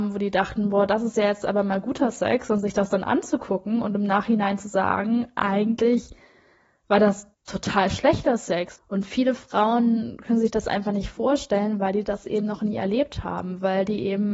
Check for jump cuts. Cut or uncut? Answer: cut